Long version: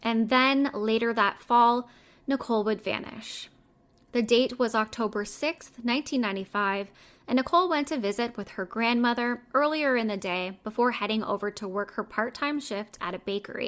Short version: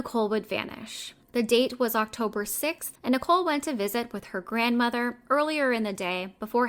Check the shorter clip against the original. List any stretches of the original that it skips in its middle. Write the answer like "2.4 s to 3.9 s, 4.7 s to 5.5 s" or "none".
3.6 s to 4.0 s, 5.7 s to 7.2 s